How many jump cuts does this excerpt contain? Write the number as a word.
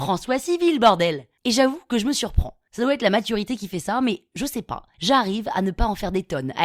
zero